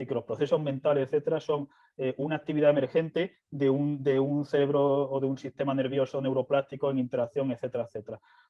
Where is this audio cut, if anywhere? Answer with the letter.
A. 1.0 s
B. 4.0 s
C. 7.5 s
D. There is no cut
D